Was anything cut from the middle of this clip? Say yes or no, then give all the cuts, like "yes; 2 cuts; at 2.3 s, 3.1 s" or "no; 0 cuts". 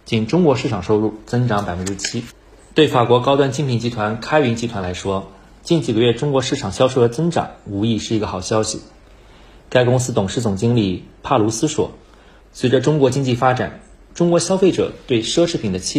yes; 1 cut; at 12.4 s